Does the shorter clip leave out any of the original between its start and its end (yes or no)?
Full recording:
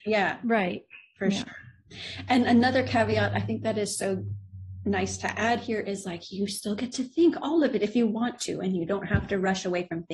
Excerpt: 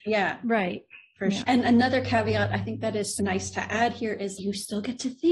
yes